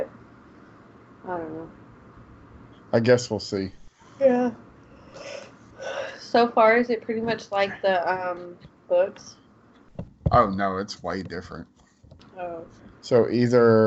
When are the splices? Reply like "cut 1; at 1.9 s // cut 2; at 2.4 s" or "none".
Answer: cut 1; at 2.7 s // cut 2; at 12.9 s